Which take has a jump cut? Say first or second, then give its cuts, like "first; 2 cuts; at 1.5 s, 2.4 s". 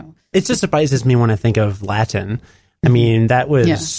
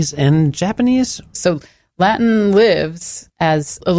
second; 1 cut; at 1.3 s